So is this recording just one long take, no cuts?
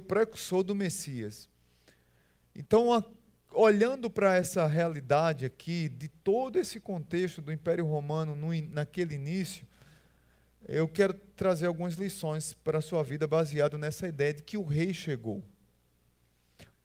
yes; 0 cuts

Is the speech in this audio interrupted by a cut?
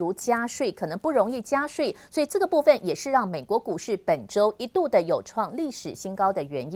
no; 0 cuts

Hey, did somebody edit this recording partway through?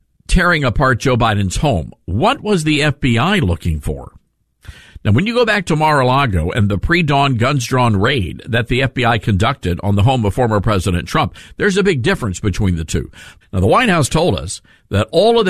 yes; 1 cut; at 13.4 s

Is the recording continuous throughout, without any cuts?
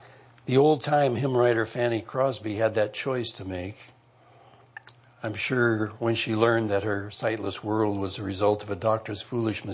yes; 0 cuts

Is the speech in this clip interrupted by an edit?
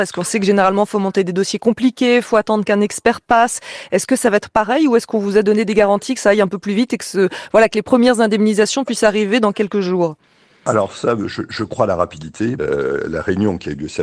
yes; 1 cut; at 12.6 s

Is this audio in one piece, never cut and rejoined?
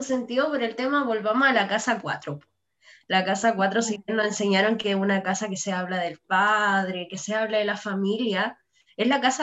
yes; 0 cuts

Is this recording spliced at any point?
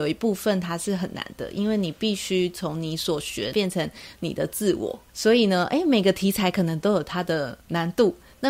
yes; 1 cut; at 3.5 s

